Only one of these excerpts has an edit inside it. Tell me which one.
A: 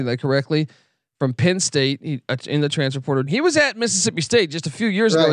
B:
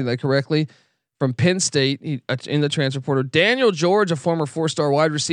A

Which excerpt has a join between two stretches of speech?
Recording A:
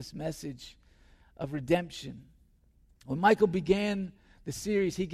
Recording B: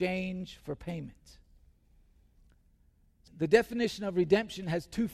B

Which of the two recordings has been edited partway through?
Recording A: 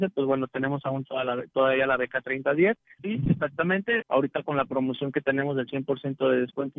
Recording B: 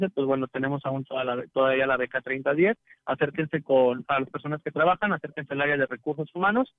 A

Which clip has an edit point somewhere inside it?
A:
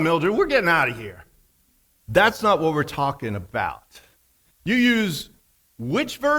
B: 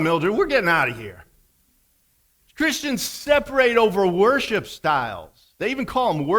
A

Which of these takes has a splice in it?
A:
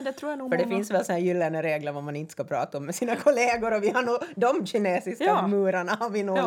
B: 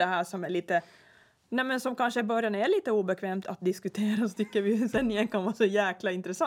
B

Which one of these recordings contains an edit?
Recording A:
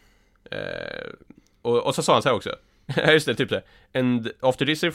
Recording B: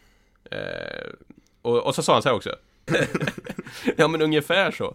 B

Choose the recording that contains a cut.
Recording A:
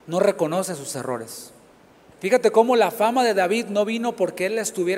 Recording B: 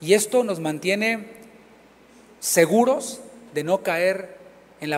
A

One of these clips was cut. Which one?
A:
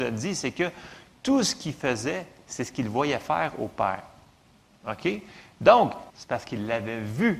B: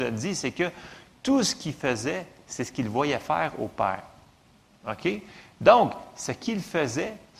A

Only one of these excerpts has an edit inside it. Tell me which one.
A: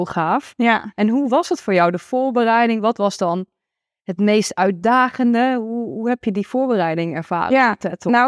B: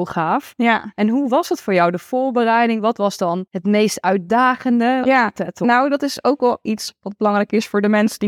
B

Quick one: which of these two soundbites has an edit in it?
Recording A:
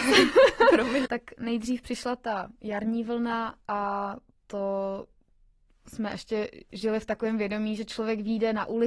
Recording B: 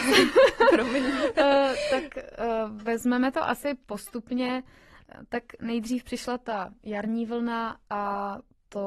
A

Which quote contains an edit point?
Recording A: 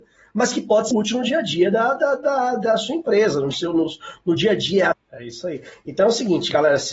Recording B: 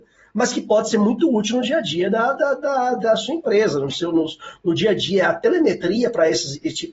A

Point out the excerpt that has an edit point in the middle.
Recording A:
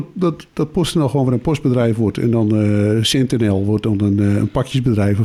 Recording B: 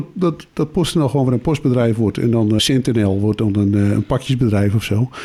B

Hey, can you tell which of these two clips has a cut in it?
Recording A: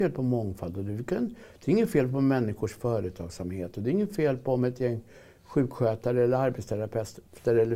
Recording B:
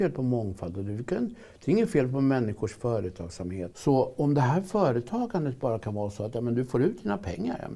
B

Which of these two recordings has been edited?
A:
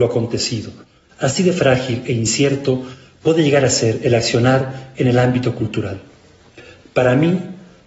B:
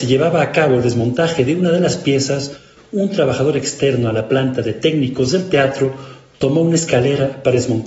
A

